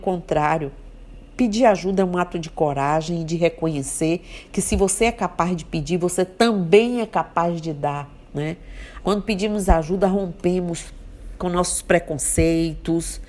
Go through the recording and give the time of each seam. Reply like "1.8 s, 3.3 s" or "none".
9.0 s